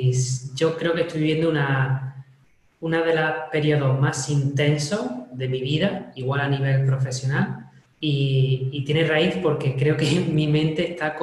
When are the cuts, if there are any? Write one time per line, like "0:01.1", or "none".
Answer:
0:07.9